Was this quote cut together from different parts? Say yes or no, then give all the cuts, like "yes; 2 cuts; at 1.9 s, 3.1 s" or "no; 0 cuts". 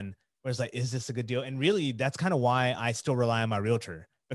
no; 0 cuts